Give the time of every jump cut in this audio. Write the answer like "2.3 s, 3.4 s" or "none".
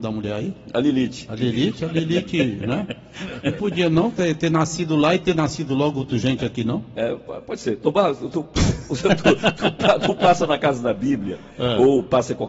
none